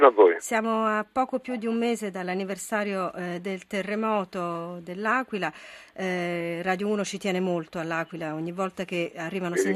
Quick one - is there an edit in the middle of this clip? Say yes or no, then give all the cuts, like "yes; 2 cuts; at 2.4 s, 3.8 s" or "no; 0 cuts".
no; 0 cuts